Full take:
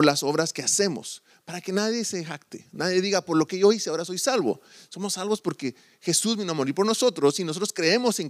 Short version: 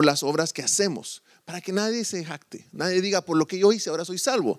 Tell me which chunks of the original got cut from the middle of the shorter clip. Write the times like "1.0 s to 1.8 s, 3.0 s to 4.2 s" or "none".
none